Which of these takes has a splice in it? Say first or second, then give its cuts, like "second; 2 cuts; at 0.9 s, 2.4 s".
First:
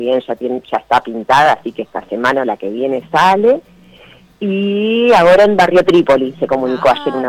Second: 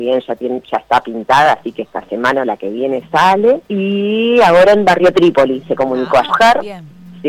second; 2 cuts; at 3.6 s, 6.3 s